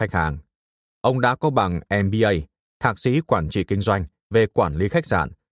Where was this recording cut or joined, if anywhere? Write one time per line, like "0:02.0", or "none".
none